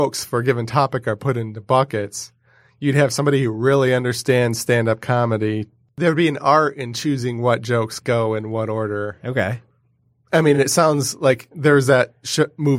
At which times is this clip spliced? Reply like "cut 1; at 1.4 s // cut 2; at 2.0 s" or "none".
none